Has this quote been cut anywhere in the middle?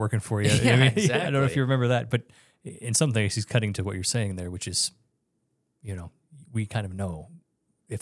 no; 0 cuts

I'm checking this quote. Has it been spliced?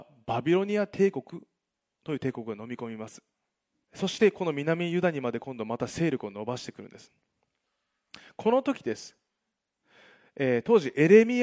yes; 1 cut; at 3.8 s

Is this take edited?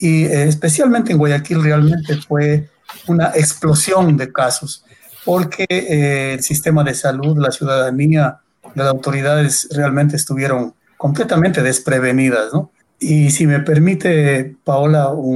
yes; 1 cut; at 12.8 s

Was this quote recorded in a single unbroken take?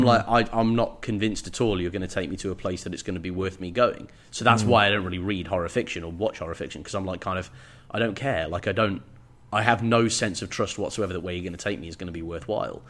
yes; 0 cuts

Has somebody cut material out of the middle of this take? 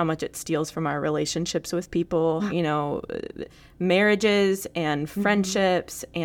yes; 1 cut; at 2.5 s

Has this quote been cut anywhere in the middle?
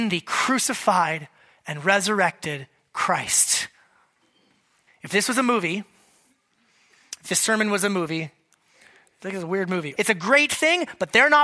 yes; 2 cuts; at 4.9 s, 10.0 s

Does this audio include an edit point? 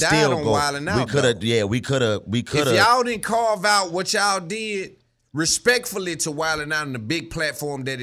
no; 0 cuts

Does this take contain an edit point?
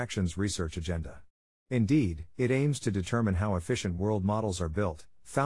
yes; 1 cut; at 2.3 s

